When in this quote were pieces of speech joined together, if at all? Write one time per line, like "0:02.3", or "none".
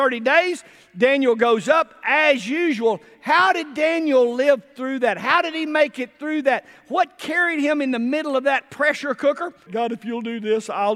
0:09.7